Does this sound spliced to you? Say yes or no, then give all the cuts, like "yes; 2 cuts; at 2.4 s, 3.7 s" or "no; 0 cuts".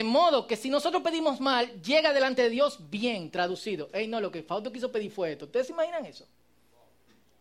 no; 0 cuts